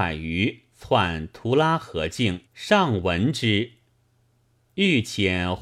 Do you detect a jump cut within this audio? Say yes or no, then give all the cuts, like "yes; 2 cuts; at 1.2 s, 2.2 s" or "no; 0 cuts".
yes; 1 cut; at 2.5 s